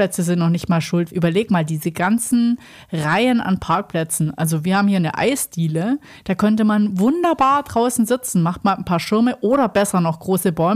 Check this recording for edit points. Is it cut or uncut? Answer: cut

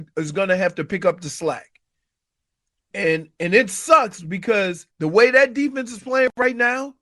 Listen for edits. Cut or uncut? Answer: cut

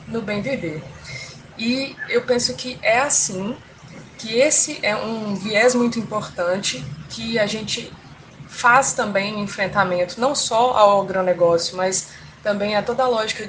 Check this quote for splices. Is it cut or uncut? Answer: uncut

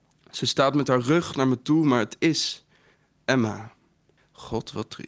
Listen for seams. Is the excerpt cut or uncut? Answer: cut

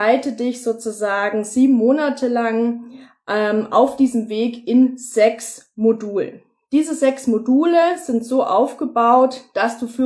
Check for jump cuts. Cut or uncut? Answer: uncut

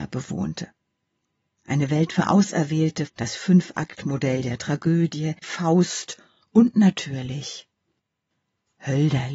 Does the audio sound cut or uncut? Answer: cut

